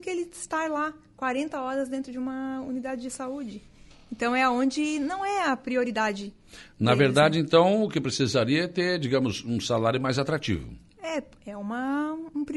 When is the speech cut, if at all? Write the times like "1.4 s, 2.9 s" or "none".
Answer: none